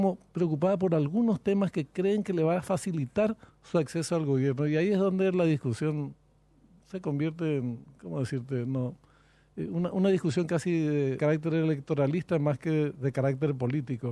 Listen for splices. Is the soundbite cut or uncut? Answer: cut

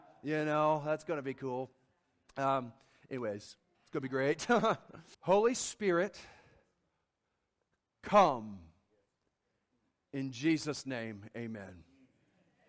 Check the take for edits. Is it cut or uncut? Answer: cut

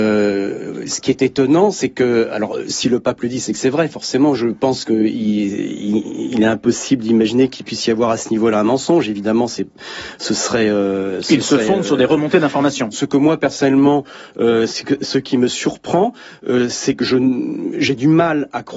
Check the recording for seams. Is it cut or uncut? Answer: cut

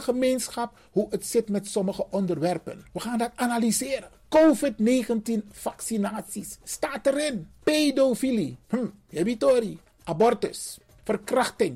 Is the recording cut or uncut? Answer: uncut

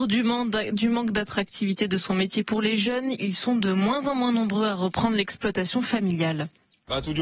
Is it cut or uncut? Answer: uncut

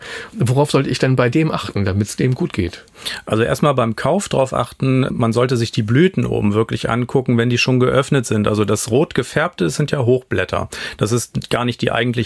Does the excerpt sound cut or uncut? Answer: uncut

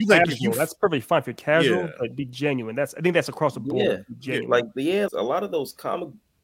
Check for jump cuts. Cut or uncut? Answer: cut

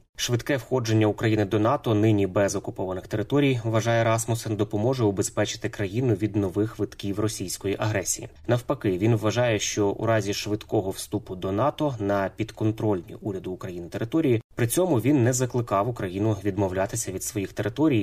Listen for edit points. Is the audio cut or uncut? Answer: cut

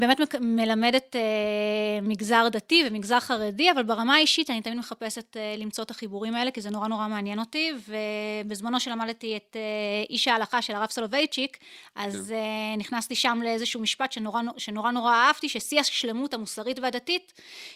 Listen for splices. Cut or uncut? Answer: uncut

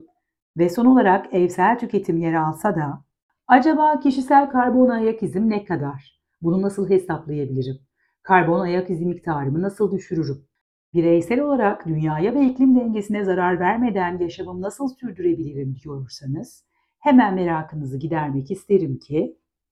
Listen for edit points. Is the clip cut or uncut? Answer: uncut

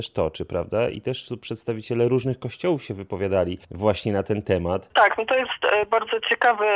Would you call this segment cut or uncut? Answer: cut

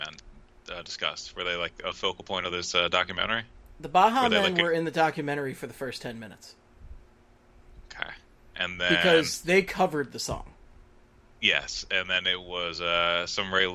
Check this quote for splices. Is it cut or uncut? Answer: uncut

